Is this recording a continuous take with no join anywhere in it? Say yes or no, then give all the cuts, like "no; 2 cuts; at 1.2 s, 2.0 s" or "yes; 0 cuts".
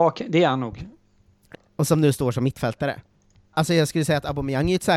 no; 1 cut; at 1.5 s